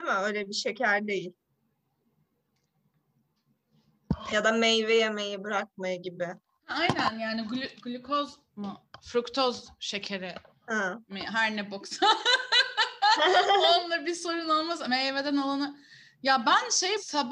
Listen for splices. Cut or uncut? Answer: uncut